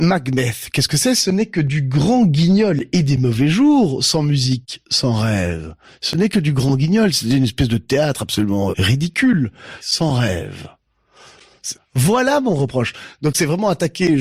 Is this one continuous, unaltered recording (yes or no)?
no